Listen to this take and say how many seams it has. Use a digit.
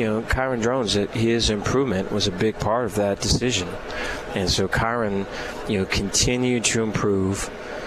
0